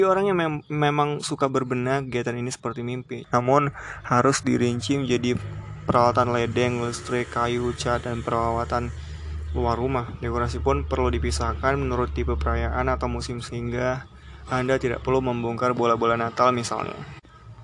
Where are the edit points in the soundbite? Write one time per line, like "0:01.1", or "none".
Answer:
0:03.2